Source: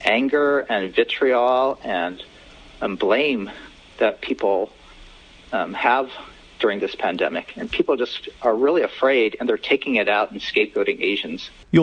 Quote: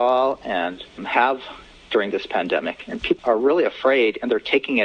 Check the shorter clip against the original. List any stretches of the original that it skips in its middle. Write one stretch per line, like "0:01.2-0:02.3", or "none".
0:02.4-0:05.7
0:07.9-0:08.4